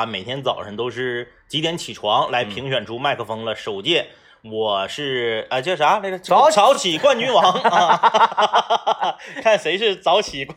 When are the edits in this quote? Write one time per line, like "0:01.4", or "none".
none